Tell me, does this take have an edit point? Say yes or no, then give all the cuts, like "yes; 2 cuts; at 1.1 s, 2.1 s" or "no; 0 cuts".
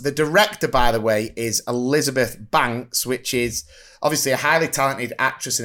no; 0 cuts